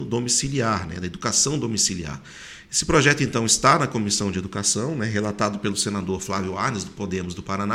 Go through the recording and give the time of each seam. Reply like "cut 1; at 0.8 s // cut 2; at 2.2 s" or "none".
none